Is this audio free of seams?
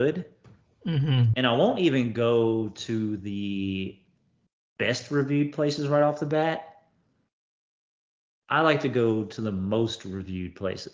no; 1 cut; at 1.3 s

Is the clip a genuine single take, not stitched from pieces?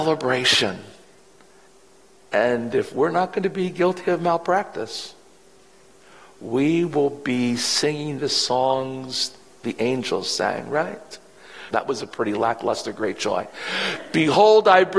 no; 1 cut; at 11.7 s

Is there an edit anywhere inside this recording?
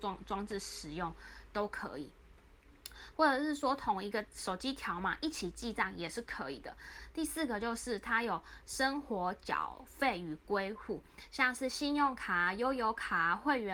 no; 0 cuts

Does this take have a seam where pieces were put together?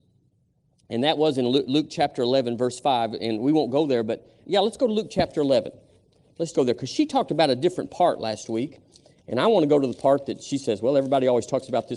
yes; 2 cuts; at 4.4 s, 6.5 s

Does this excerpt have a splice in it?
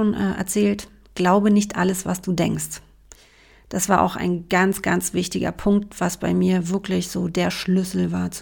no; 0 cuts

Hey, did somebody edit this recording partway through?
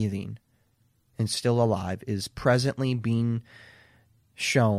no; 0 cuts

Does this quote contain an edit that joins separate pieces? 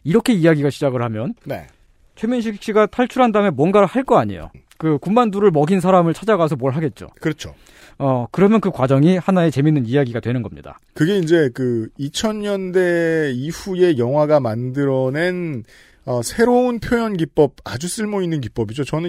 no; 0 cuts

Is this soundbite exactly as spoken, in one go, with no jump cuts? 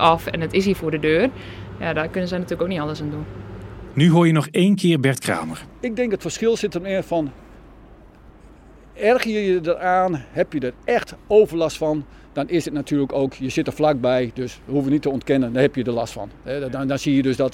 yes; 0 cuts

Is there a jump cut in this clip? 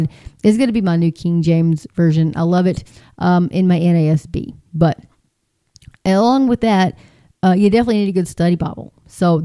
no; 0 cuts

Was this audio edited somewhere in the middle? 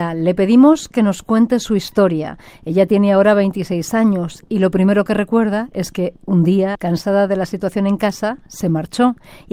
yes; 1 cut; at 6.7 s

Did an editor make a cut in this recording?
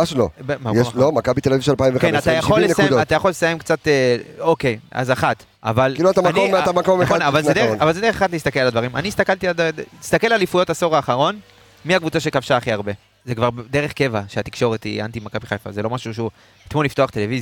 yes; 2 cuts; at 5.5 s, 13.1 s

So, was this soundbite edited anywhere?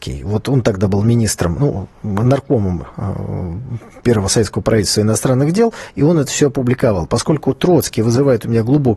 no; 0 cuts

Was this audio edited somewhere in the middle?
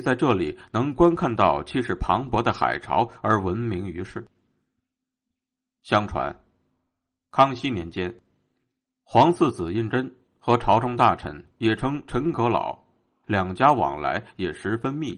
yes; 2 cuts; at 11.6 s, 13.2 s

